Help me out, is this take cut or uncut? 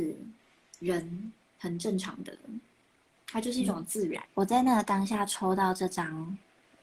cut